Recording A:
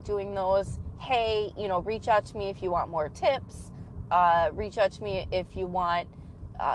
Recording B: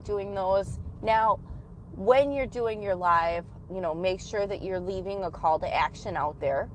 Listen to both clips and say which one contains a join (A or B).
B